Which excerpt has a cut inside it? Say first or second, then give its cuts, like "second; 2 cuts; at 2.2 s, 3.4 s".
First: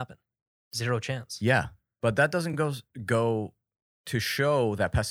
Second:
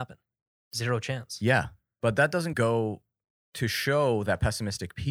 second; 1 cut; at 2.5 s